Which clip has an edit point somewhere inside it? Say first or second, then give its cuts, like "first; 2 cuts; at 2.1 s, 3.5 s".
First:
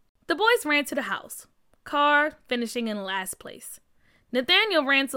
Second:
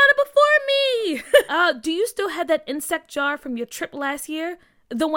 second; 1 cut; at 1.5 s